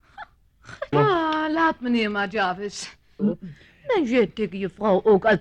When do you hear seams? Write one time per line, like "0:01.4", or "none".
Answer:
0:00.9
0:03.2